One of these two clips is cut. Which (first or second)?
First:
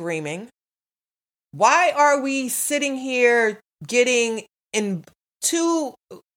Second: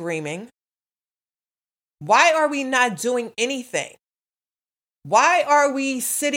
first